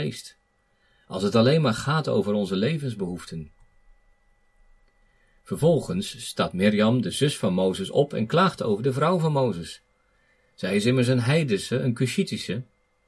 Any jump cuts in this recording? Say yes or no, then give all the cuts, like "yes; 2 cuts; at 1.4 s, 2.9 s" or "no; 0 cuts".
no; 0 cuts